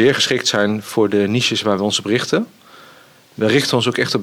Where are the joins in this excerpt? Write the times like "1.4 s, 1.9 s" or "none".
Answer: none

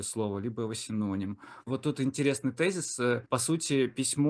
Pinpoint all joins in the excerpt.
1.6 s

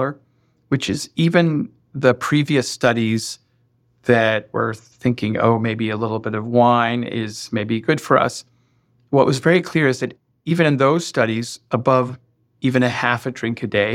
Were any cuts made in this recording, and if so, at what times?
none

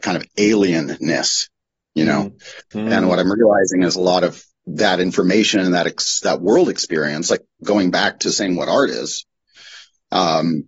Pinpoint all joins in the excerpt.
2.7 s

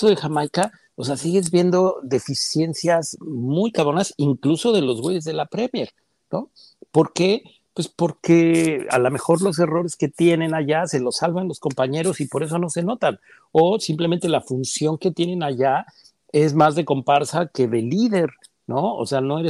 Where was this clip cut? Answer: none

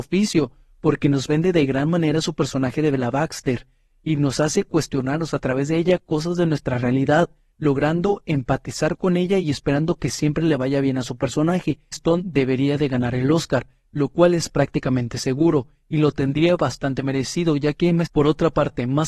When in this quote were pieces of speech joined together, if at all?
11.9 s, 18.1 s

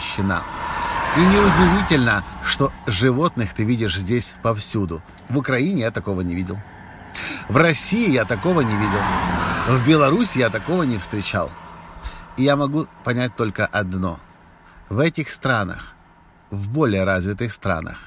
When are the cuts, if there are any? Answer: 5.2 s

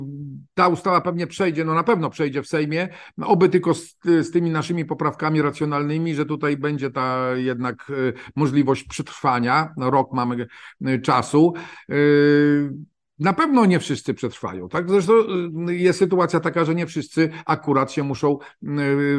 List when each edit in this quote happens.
none

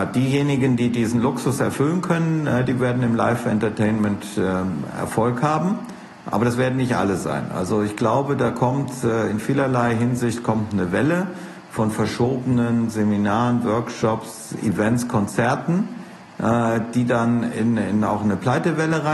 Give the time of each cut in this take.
none

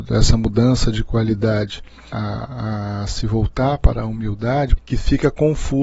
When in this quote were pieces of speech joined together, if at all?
2.1 s, 4.8 s

